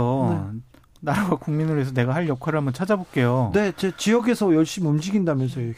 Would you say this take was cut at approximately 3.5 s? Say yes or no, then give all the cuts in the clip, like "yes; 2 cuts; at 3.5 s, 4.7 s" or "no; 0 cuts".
no; 0 cuts